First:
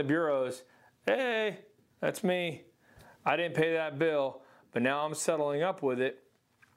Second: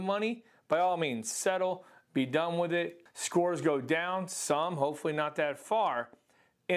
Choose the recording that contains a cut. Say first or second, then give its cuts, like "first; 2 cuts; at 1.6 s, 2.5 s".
second; 1 cut; at 3.1 s